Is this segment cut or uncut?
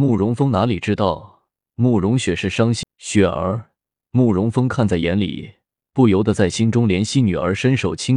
cut